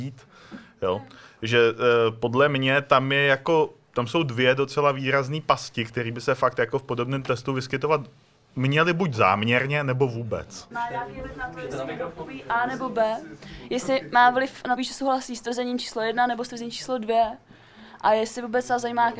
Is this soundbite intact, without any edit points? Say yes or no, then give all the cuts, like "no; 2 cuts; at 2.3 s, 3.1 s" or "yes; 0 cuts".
no; 2 cuts; at 10.7 s, 14.8 s